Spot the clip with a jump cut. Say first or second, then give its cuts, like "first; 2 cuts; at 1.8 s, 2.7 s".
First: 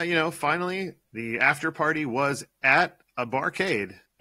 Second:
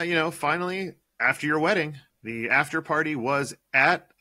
first; 1 cut; at 1.0 s